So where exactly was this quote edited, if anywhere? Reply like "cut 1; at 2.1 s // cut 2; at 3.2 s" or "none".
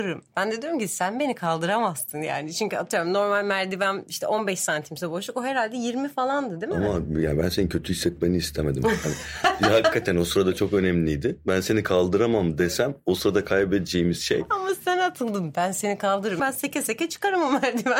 cut 1; at 16.4 s